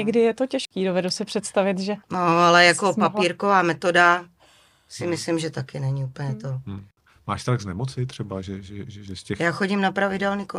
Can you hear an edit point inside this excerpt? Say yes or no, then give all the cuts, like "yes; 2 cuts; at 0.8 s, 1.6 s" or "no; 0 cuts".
yes; 1 cut; at 2.0 s